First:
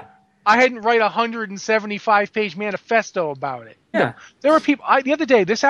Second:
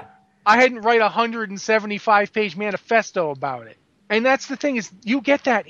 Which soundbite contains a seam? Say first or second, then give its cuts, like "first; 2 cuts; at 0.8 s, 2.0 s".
first; 1 cut; at 3.9 s